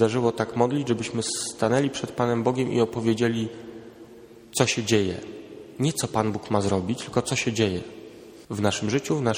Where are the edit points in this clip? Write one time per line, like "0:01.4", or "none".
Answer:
0:08.4